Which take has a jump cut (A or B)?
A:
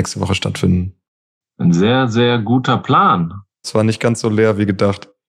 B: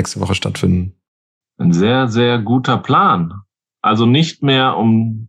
A